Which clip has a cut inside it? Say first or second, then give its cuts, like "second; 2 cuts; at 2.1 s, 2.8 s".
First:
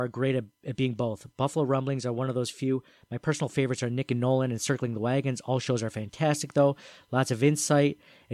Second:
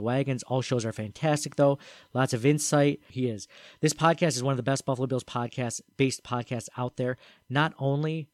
second; 1 cut; at 3.1 s